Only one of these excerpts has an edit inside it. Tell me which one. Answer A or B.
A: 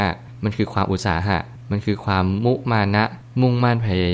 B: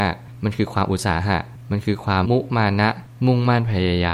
B